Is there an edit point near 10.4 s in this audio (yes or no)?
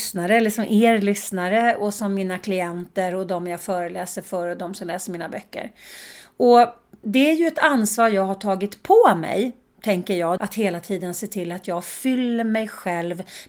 yes